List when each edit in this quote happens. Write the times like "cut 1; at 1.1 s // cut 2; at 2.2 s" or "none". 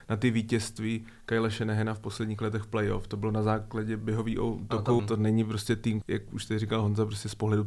cut 1; at 5.0 s // cut 2; at 6.0 s